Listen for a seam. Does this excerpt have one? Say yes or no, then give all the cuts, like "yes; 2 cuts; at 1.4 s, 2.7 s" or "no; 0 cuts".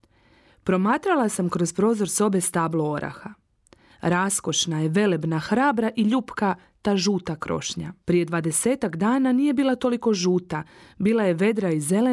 yes; 1 cut; at 8.0 s